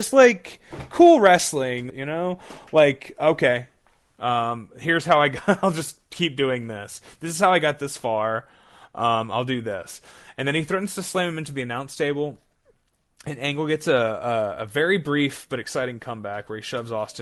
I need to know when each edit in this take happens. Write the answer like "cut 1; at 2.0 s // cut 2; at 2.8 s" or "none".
cut 1; at 1.9 s

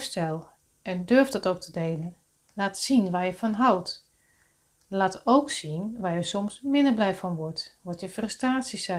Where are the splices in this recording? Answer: none

